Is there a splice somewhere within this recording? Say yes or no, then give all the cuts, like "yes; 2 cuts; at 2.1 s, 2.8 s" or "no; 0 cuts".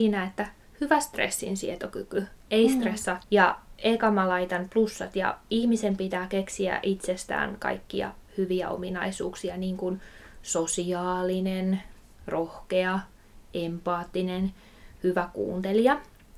yes; 1 cut; at 3.2 s